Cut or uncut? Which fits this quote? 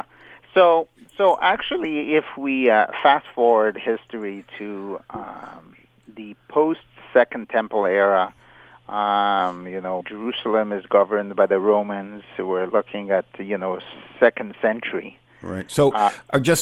cut